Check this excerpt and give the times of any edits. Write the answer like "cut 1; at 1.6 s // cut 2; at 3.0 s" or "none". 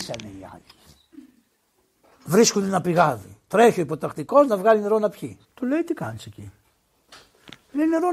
cut 1; at 2.0 s // cut 2; at 5.4 s